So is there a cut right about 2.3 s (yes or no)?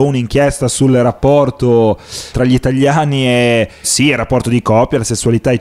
yes